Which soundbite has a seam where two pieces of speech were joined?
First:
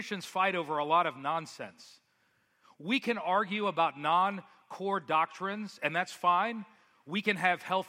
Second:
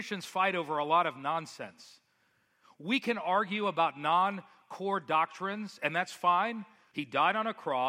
second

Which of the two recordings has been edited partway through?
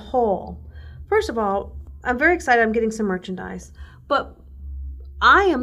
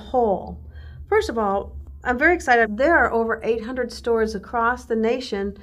second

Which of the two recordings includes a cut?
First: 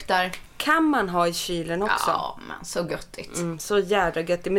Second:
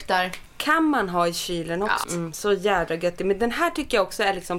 second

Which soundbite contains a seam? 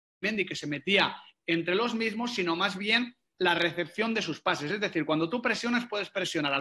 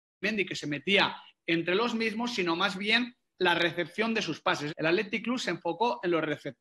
second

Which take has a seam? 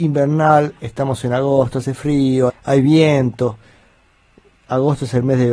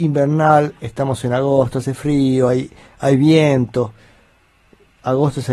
first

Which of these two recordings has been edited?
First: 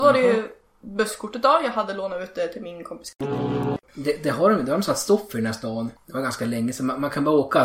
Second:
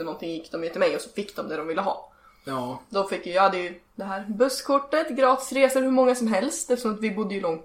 first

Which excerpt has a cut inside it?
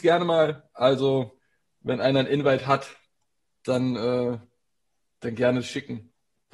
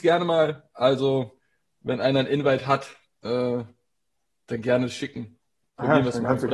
second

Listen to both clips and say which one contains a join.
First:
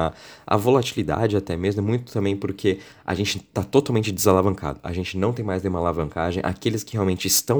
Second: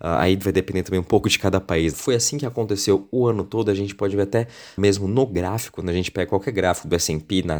second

